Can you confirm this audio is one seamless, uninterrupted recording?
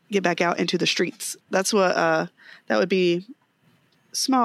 no; 1 cut; at 1.4 s

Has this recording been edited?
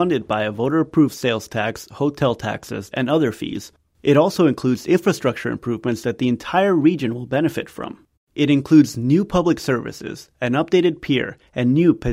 yes; 2 cuts; at 2.9 s, 8.2 s

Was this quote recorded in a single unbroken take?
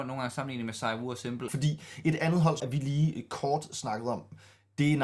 no; 2 cuts; at 1.5 s, 2.6 s

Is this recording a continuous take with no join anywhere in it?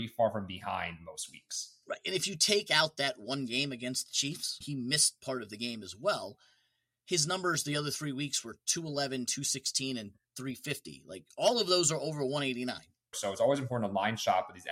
no; 2 cuts; at 4.6 s, 13.1 s

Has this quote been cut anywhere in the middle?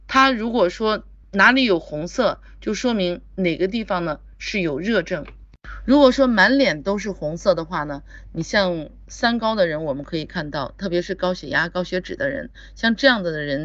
yes; 1 cut; at 1.2 s

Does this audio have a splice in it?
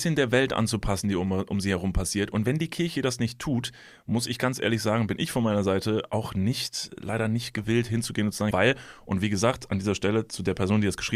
yes; 1 cut; at 8.5 s

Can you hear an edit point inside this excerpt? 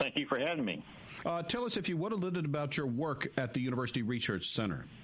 no; 0 cuts

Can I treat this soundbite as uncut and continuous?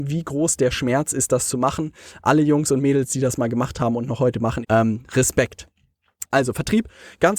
no; 2 cuts; at 4.6 s, 6.3 s

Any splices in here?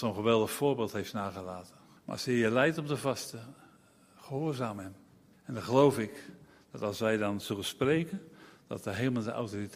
yes; 2 cuts; at 2.0 s, 5.3 s

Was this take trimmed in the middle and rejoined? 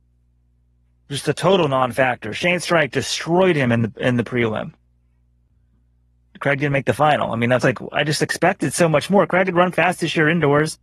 yes; 2 cuts; at 7.6 s, 9.7 s

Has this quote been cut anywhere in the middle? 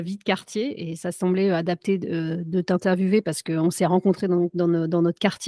no; 0 cuts

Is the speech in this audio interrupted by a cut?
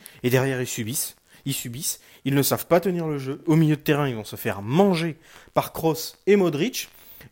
no; 0 cuts

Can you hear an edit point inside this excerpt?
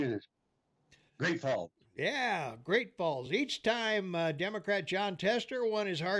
no; 0 cuts

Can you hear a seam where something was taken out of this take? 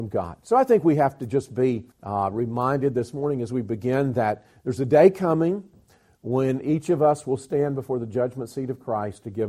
yes; 1 cut; at 1.9 s

